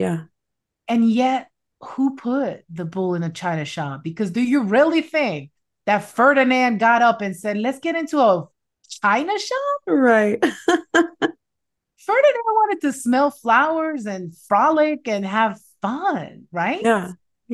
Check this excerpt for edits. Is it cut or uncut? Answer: uncut